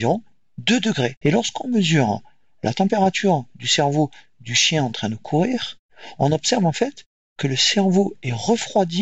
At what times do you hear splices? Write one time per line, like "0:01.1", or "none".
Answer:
0:01.2